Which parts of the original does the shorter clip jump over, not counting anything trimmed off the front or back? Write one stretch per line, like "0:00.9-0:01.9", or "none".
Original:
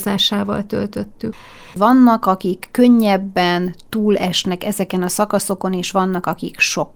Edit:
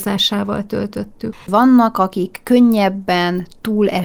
0:01.4-0:01.7